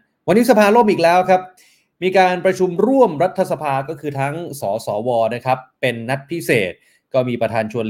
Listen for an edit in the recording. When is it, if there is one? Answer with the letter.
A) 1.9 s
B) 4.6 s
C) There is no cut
B